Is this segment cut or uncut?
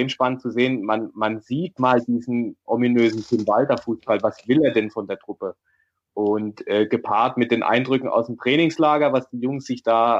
uncut